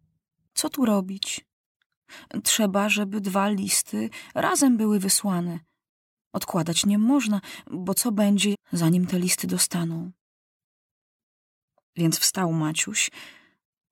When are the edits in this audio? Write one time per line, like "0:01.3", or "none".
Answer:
0:08.5